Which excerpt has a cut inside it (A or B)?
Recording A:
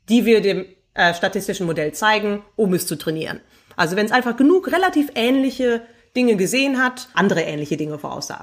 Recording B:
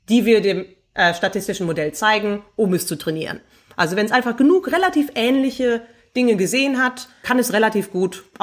A